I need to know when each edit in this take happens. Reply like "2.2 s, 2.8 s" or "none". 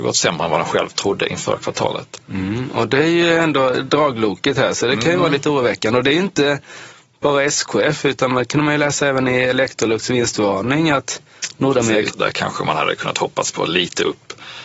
12.1 s